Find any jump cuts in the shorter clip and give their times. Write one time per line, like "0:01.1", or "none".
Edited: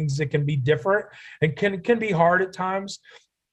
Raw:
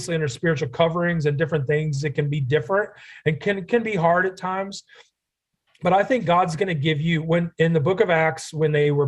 none